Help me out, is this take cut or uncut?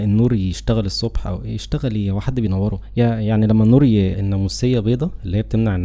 cut